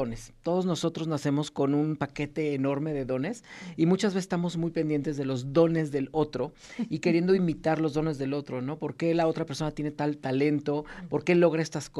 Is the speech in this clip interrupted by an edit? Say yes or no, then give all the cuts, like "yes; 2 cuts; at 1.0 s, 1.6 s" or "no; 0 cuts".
no; 0 cuts